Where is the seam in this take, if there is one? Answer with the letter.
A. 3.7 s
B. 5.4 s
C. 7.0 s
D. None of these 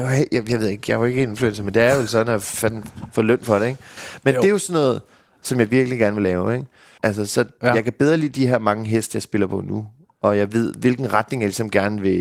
C